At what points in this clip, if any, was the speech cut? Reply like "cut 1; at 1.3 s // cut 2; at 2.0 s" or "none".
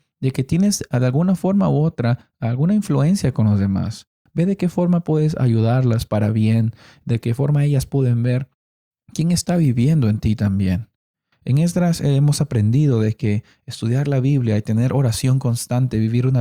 cut 1; at 4.3 s